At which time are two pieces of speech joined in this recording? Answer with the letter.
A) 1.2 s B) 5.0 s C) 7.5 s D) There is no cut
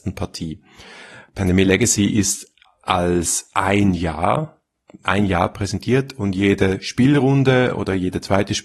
B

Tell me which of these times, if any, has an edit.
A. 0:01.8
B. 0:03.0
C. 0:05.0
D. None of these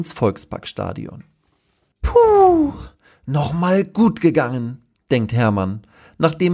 D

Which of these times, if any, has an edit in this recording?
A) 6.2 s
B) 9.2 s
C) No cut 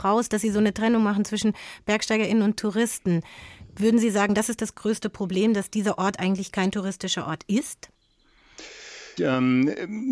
B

